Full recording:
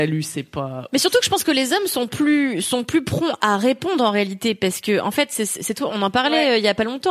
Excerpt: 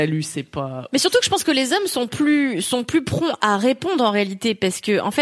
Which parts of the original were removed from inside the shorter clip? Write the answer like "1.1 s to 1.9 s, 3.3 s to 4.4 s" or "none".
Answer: none